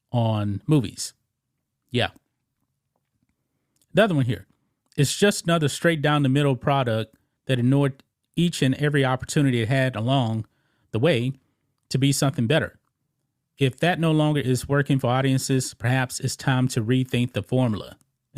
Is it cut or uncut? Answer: uncut